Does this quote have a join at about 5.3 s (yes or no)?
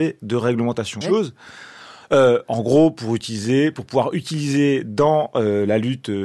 no